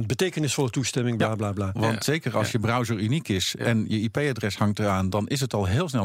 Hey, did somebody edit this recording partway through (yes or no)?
yes